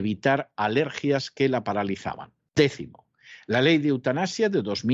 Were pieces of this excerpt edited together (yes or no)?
yes